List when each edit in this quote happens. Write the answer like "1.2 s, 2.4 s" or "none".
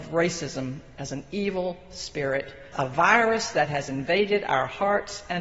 2.7 s